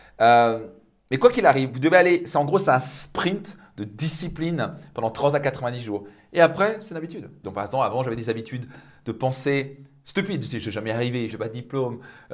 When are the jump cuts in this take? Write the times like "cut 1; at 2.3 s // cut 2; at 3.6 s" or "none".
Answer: cut 1; at 7.4 s // cut 2; at 11.3 s